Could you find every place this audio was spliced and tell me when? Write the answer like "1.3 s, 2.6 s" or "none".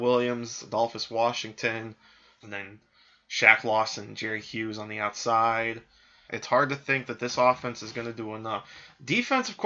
2.4 s, 6.3 s